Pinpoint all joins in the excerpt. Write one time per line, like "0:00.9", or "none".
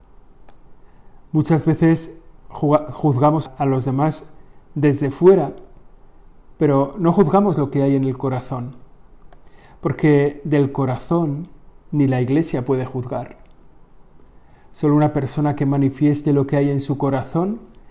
0:03.5